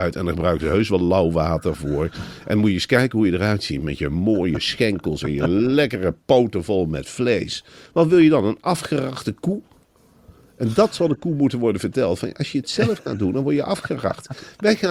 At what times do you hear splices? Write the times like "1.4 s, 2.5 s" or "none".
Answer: none